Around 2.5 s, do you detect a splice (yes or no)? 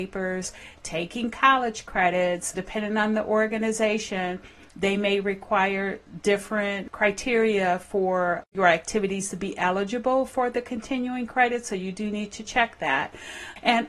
yes